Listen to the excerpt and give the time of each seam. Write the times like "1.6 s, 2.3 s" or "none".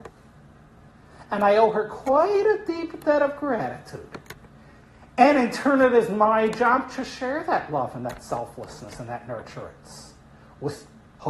none